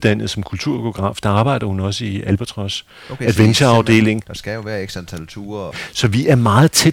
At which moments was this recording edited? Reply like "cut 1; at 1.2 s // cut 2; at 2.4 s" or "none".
cut 1; at 4.2 s // cut 2; at 5.7 s